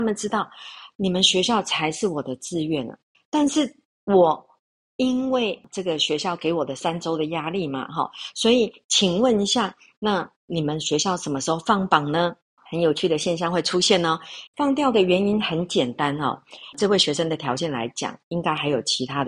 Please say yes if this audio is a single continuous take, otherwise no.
no